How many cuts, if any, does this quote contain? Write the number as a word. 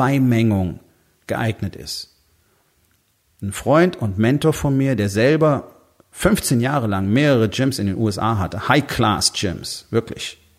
zero